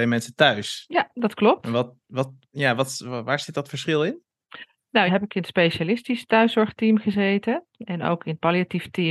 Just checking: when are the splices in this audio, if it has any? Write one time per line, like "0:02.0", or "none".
0:05.1